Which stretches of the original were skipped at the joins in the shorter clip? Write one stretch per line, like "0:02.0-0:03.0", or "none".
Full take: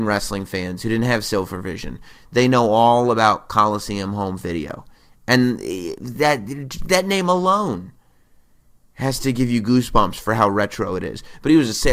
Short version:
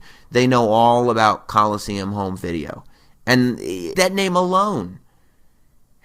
0:06.0-0:06.9